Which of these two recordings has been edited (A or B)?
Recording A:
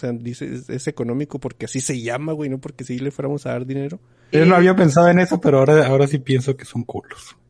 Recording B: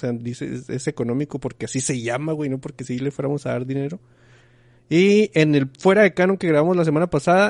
A